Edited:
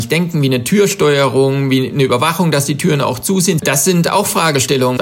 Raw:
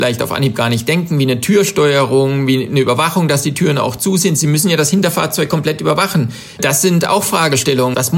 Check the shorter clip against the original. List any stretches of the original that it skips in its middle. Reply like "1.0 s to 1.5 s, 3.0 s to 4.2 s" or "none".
4.4 s to 6.6 s